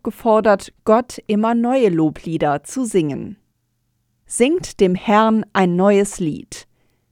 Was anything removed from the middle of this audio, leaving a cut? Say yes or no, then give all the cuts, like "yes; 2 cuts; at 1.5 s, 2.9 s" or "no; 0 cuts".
no; 0 cuts